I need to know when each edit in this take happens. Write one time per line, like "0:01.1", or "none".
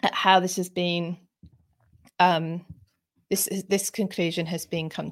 none